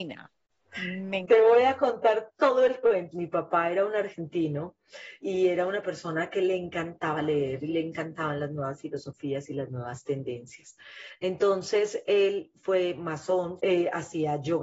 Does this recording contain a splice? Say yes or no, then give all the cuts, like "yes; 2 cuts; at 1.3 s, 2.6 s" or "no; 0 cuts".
yes; 3 cuts; at 3.1 s, 5.2 s, 13.6 s